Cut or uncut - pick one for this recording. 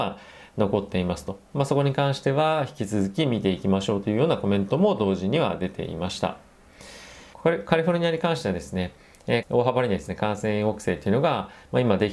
cut